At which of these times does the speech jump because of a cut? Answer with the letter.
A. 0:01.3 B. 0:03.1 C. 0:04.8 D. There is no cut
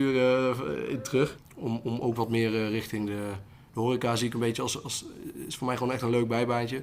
A